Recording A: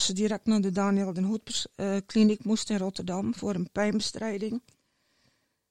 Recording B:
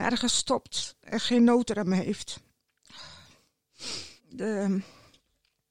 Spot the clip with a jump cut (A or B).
B